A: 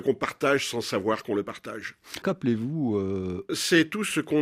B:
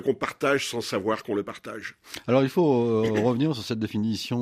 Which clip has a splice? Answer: A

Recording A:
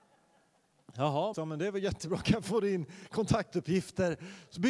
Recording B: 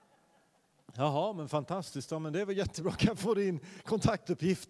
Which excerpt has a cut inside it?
A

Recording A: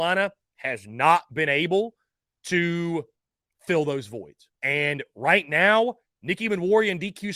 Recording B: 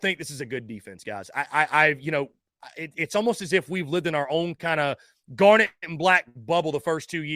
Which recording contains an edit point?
A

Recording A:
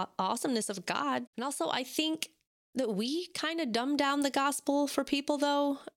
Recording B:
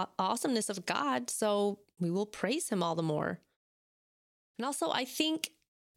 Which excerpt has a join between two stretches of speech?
A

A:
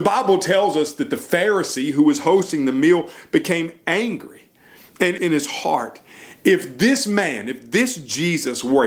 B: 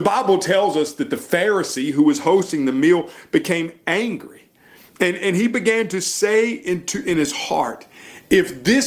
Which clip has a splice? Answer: A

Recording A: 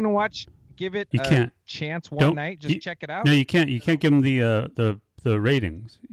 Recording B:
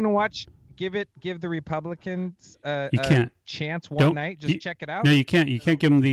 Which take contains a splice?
A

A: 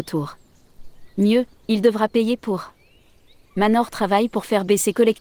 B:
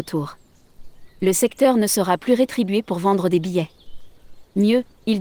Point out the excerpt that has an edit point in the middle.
A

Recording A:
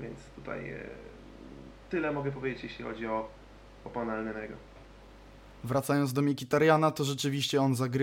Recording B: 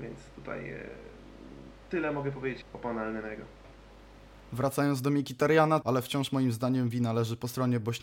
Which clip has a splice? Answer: B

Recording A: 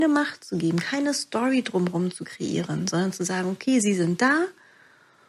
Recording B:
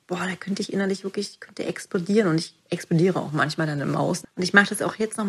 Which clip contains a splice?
B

